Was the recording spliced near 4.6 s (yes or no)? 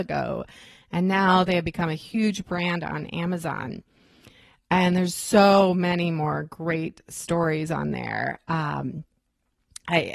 no